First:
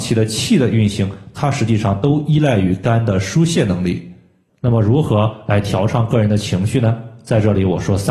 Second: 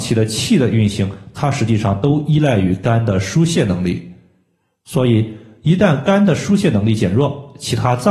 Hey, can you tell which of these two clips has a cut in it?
first; 1 cut; at 4.5 s

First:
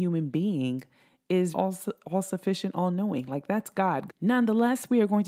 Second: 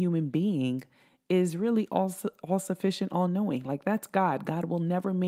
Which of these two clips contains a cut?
first; 2 cuts; at 1.5 s, 4.1 s

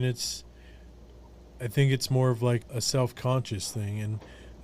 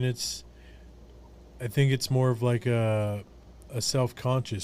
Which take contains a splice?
first; 1 cut; at 2.6 s

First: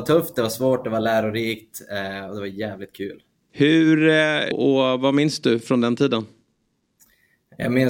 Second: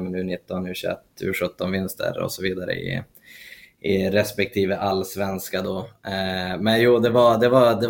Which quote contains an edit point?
first; 2 cuts; at 3.5 s, 4.5 s

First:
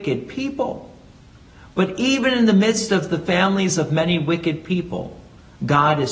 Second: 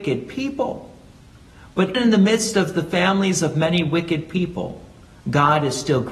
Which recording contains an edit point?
second; 1 cut; at 1.9 s

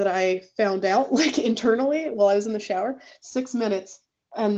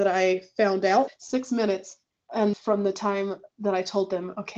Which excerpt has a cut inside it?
second; 2 cuts; at 1.1 s, 2.5 s

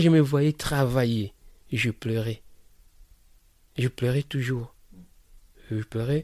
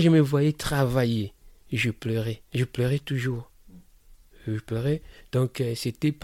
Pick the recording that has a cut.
second; 1 cut; at 2.4 s

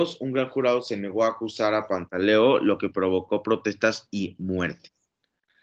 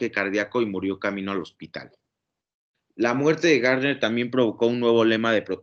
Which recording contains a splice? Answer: second; 1 cut; at 2.7 s

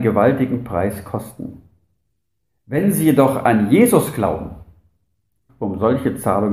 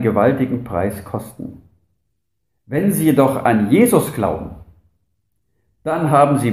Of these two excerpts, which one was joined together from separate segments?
first; 1 cut; at 5.5 s

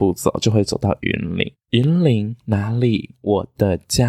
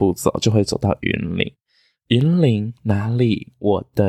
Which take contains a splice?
first; 1 cut; at 1.6 s

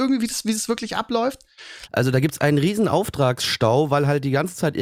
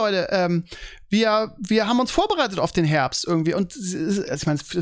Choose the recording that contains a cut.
first; 1 cut; at 1.9 s

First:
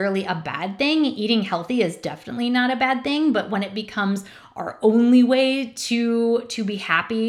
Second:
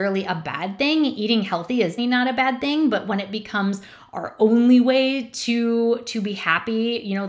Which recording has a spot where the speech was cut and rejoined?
second; 1 cut; at 2.0 s

